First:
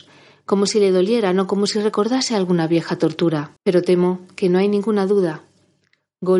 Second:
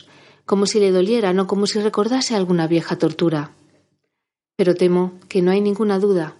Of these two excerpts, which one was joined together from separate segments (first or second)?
first